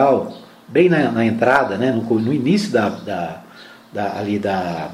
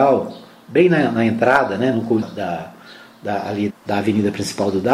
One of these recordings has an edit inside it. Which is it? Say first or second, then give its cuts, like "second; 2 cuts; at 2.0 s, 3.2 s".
second; 2 cuts; at 2.2 s, 3.7 s